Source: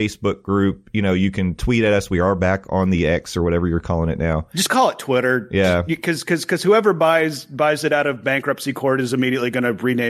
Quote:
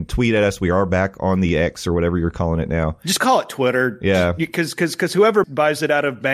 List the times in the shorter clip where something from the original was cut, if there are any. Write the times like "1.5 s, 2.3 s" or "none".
5.4 s